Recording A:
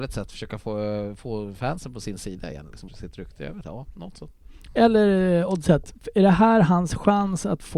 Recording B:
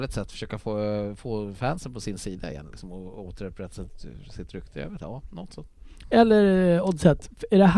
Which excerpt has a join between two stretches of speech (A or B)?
A